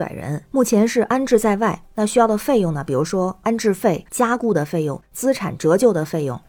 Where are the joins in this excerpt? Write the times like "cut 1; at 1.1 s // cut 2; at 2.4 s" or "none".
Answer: cut 1; at 4.1 s